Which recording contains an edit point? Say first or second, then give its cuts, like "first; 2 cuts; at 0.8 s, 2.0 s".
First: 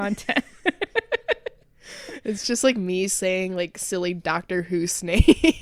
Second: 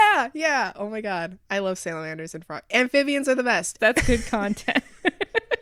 second; 1 cut; at 3.8 s